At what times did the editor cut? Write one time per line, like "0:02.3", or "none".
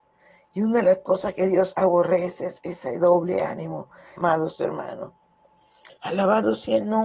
0:04.2
0:05.9